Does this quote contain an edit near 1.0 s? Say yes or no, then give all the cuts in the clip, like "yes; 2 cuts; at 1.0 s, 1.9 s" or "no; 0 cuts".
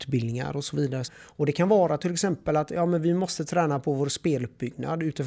yes; 1 cut; at 1.0 s